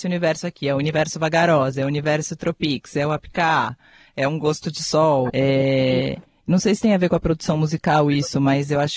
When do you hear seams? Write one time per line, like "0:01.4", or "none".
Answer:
0:05.3